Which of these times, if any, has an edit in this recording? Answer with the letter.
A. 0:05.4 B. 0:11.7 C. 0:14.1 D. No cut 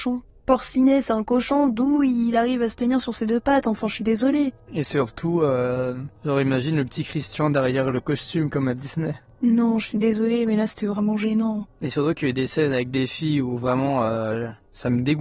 B